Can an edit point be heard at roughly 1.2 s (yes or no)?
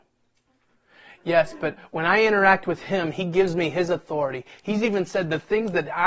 no